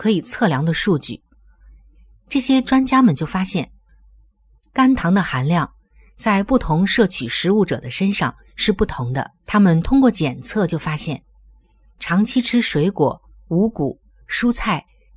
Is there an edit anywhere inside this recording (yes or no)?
yes